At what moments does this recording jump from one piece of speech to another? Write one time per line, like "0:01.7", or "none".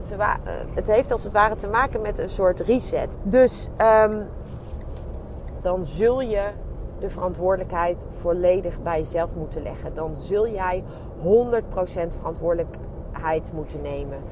0:03.1
0:05.6